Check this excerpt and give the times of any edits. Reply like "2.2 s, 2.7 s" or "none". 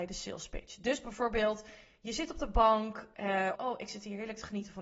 3.5 s